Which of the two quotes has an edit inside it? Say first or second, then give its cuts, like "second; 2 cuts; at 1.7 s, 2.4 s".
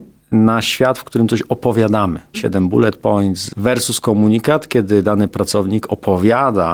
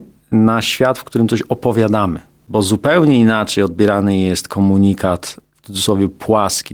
first; 2 cuts; at 2.3 s, 3.5 s